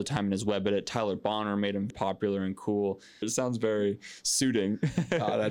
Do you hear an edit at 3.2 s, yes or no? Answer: yes